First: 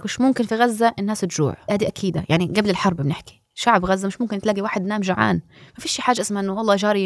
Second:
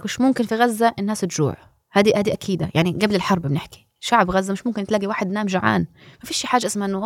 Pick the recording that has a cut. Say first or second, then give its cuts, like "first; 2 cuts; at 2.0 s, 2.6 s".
first; 1 cut; at 1.7 s